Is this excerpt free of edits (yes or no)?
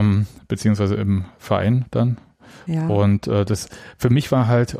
yes